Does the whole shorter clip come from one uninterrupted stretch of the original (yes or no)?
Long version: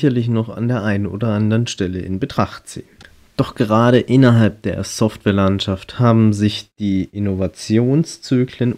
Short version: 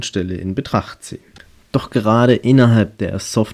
yes